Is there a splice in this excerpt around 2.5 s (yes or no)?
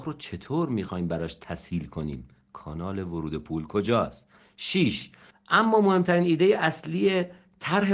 no